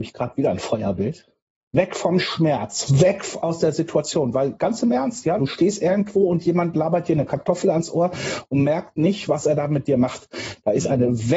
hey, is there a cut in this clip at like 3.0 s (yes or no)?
no